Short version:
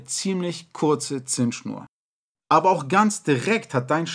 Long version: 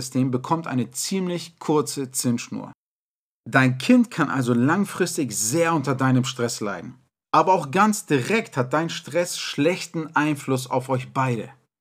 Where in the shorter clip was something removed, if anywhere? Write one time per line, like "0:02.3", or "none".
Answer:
0:02.3